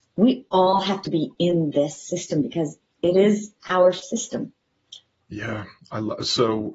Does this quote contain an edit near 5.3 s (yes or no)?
yes